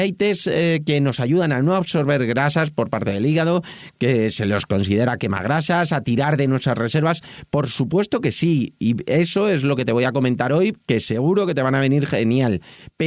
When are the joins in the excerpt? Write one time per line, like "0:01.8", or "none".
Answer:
none